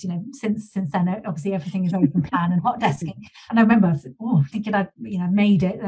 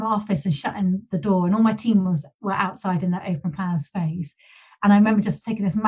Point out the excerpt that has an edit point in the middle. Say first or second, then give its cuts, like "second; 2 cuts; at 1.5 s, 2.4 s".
first; 2 cuts; at 3.5 s, 4.5 s